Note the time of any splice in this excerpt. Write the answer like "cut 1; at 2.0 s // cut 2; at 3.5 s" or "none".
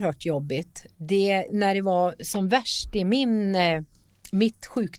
cut 1; at 1.5 s